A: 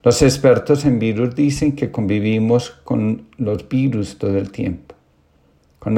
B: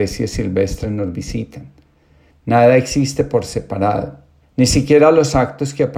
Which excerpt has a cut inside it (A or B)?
B